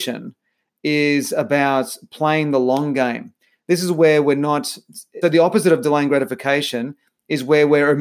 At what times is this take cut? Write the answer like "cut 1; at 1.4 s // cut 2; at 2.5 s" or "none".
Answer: cut 1; at 5.2 s